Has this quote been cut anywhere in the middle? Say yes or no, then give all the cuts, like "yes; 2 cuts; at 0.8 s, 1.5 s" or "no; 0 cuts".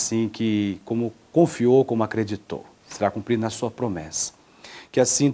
no; 0 cuts